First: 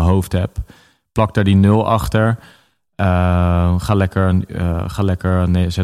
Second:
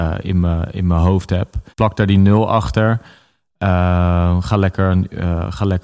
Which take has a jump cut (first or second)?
second